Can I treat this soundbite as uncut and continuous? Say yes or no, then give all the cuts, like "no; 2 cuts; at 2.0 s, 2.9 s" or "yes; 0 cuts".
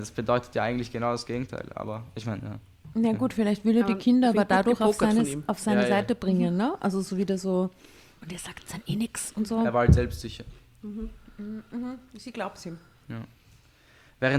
yes; 0 cuts